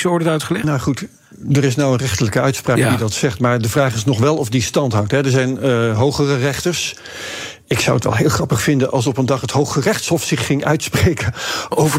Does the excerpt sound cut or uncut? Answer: uncut